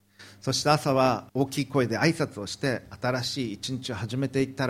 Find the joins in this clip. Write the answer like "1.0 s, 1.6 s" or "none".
1.3 s